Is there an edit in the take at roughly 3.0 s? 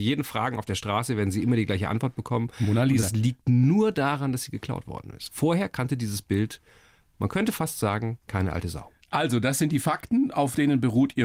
no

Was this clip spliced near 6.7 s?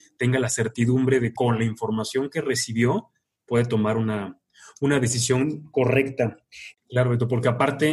yes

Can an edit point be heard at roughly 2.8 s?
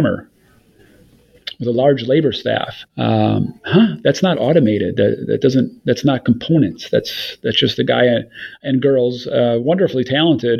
yes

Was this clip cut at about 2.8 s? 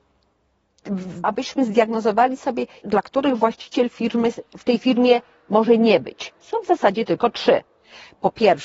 yes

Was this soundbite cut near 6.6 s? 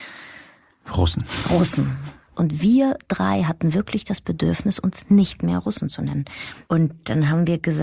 yes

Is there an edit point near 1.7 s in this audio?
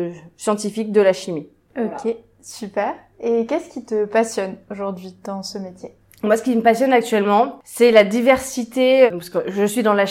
yes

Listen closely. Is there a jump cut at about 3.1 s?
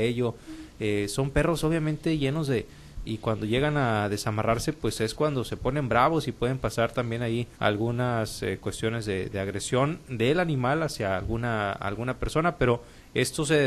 yes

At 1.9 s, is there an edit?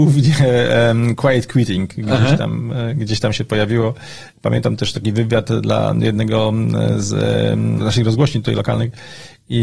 no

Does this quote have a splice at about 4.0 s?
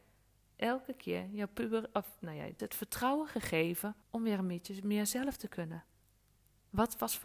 yes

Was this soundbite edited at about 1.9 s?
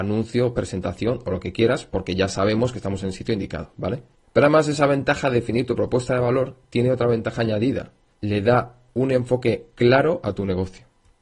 no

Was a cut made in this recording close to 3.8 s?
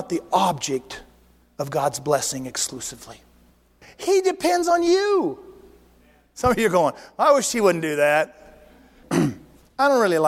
yes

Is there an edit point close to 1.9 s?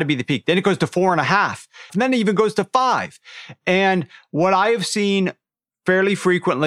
yes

